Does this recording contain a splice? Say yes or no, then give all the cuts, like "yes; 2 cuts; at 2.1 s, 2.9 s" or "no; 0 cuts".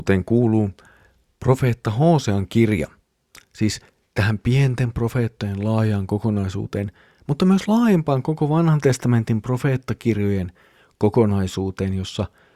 no; 0 cuts